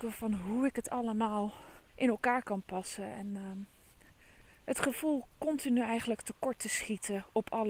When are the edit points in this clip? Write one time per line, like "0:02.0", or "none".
0:01.9